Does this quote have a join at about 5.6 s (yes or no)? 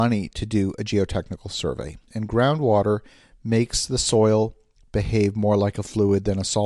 no